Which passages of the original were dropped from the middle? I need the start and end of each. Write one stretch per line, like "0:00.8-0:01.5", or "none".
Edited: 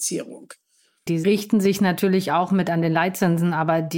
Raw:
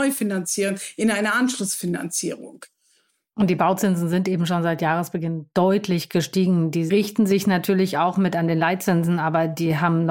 0:03.2-0:06.7